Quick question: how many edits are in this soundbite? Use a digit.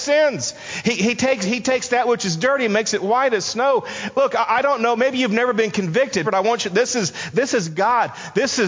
2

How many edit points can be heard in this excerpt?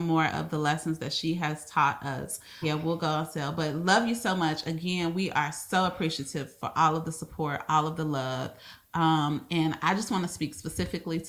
1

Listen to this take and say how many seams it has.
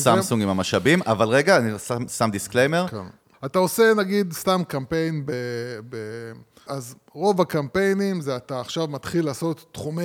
2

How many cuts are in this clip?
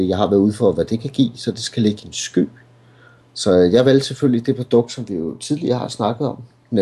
1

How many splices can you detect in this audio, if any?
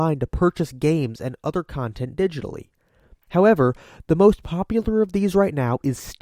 0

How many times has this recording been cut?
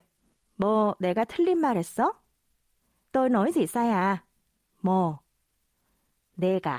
1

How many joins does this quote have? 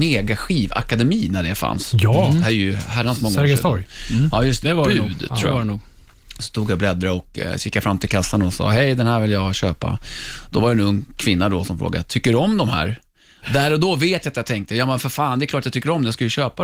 1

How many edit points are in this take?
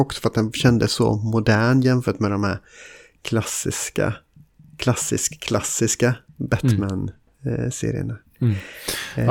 0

